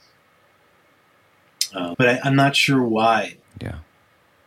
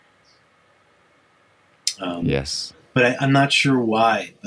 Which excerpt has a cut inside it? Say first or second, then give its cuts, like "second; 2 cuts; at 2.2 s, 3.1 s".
first; 2 cuts; at 1.9 s, 3.4 s